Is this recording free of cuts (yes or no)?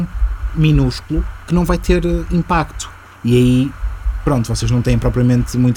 yes